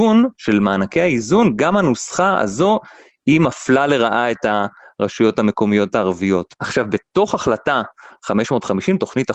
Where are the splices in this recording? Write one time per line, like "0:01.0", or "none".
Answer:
0:06.5